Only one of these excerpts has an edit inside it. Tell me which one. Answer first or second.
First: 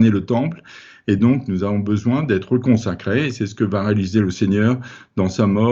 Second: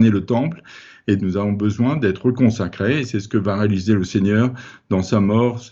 second